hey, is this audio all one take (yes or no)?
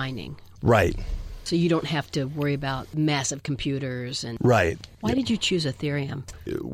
yes